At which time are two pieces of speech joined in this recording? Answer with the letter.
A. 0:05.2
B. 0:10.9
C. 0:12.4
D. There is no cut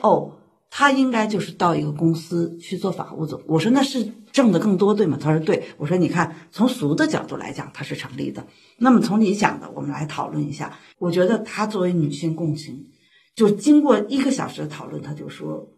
B